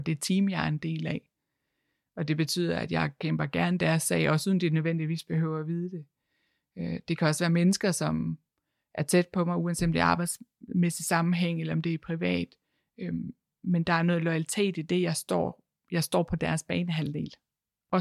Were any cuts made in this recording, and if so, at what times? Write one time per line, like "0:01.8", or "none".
none